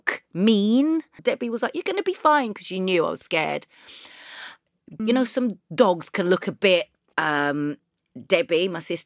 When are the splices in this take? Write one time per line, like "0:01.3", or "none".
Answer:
0:01.2
0:05.0
0:07.1